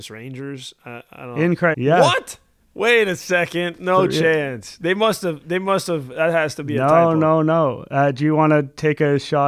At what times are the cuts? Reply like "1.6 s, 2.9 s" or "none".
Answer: 1.7 s